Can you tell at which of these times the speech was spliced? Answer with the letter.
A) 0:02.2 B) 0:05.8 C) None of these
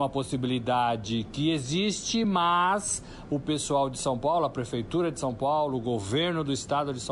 C